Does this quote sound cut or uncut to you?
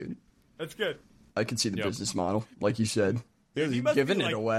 cut